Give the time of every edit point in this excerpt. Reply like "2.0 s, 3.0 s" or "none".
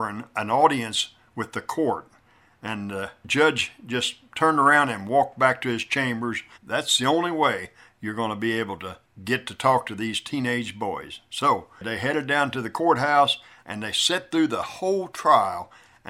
6.5 s, 13.6 s